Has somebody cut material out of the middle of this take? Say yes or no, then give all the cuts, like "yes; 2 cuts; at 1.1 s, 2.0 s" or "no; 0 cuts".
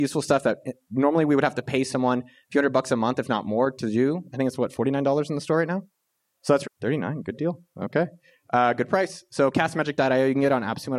yes; 1 cut; at 6.6 s